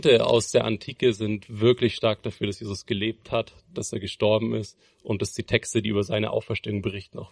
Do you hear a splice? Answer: no; 0 cuts

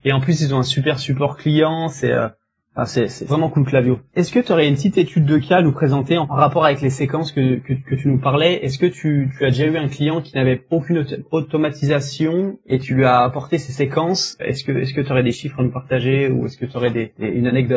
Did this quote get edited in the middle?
yes; 1 cut; at 4.1 s

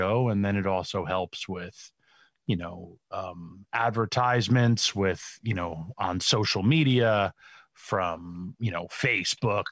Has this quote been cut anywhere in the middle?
no; 0 cuts

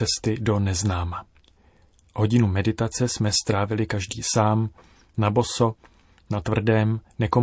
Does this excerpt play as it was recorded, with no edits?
yes; 0 cuts

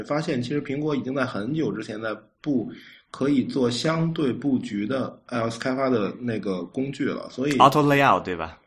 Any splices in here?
no; 0 cuts

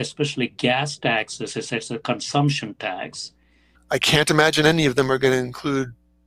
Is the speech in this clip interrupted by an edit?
yes; 1 cut; at 3.7 s

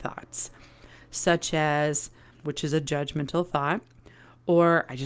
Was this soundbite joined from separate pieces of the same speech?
yes; 1 cut; at 2.4 s

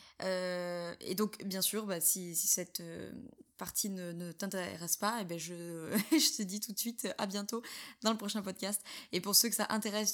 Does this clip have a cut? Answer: no; 0 cuts

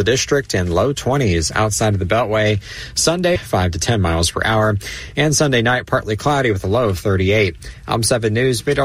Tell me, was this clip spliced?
yes; 1 cut; at 3.4 s

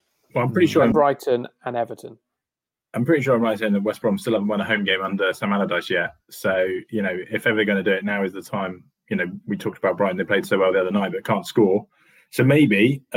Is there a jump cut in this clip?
yes; 1 cut; at 0.9 s

